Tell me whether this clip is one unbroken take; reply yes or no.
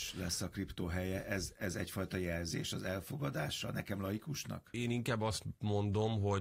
yes